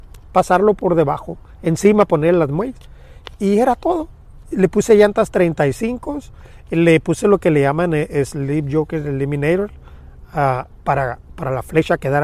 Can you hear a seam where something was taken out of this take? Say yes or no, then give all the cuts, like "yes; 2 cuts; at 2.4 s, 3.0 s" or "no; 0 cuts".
no; 0 cuts